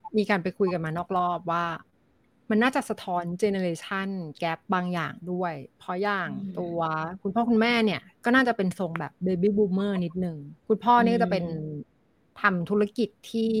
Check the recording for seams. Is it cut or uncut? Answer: cut